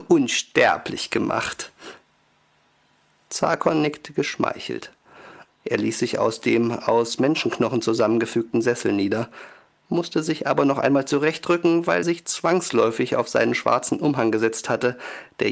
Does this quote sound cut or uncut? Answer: cut